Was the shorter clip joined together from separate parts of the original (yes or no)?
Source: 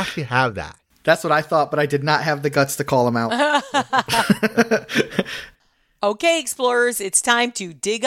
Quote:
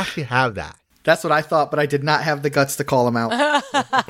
no